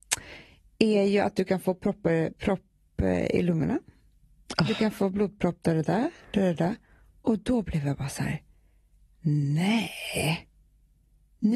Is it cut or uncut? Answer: uncut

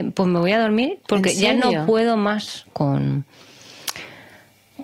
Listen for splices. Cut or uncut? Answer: cut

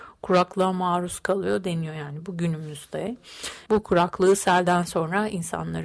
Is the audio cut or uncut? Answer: cut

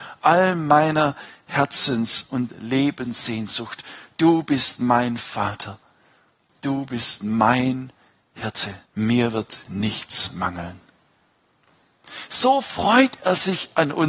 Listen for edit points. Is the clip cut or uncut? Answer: cut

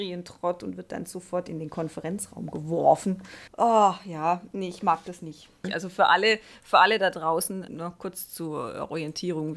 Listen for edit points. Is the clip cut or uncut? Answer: cut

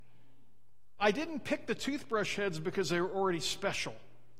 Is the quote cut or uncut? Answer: cut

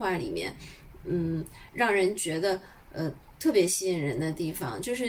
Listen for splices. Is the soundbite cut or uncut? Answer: cut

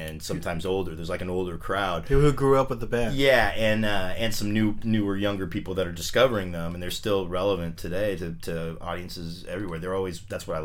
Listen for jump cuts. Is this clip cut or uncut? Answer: uncut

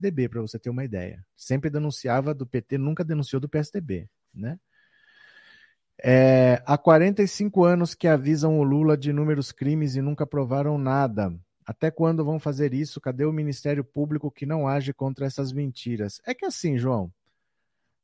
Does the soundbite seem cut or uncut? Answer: uncut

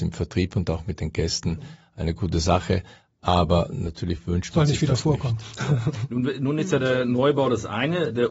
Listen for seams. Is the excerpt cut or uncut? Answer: uncut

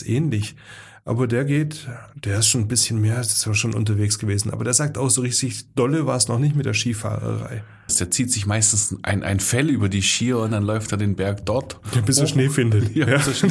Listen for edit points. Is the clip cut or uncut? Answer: cut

